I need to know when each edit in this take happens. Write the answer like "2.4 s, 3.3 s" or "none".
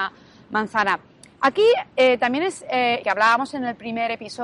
3.0 s